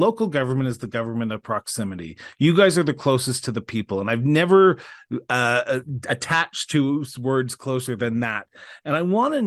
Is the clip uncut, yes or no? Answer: yes